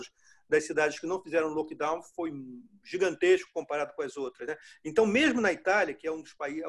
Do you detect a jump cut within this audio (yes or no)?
no